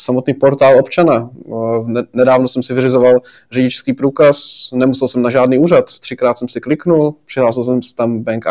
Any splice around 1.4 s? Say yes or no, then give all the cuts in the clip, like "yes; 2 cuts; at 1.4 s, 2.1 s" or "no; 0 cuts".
no; 0 cuts